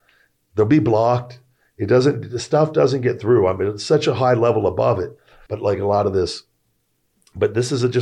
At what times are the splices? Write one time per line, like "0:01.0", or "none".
0:05.5